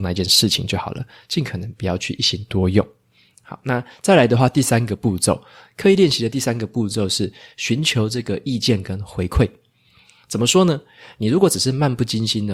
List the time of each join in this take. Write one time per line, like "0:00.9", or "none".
none